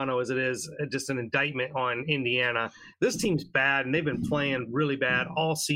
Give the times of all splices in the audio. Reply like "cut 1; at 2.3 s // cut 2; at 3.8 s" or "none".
none

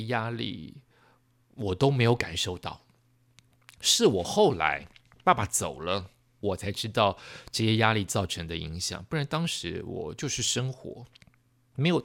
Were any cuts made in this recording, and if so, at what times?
cut 1; at 6.4 s

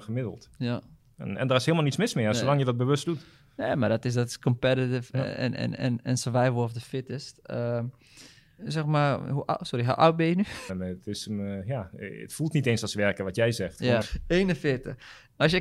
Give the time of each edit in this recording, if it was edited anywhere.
cut 1; at 8.6 s // cut 2; at 10.7 s // cut 3; at 14.0 s

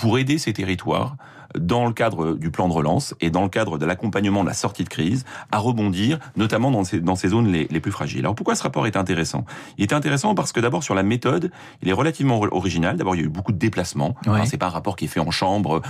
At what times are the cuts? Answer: none

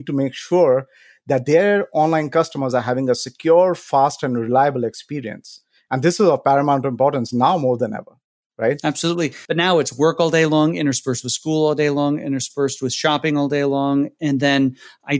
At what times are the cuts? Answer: cut 1; at 9.5 s

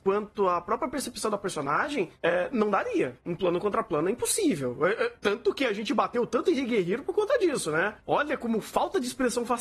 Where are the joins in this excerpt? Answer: none

